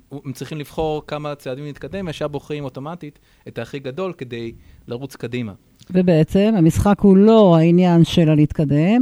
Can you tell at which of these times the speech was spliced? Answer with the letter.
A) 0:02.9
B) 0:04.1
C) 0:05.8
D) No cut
D